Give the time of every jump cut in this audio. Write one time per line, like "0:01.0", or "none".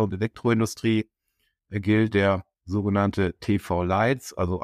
none